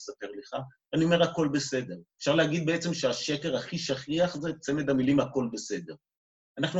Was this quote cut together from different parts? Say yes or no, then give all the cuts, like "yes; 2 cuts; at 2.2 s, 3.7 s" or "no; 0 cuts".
yes; 1 cut; at 2.1 s